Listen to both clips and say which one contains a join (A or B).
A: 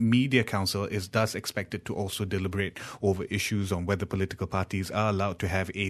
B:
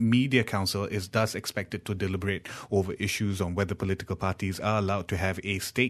B